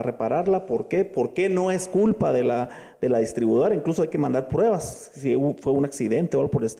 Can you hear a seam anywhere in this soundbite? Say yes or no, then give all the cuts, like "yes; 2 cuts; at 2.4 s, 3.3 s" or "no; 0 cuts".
no; 0 cuts